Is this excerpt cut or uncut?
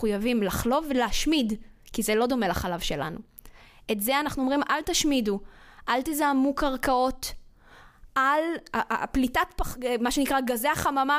uncut